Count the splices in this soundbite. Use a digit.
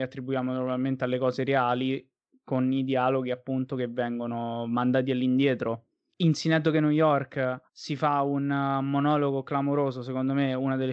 2